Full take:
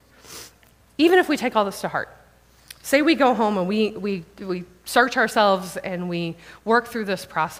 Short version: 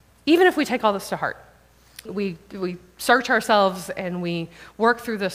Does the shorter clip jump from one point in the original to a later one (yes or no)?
yes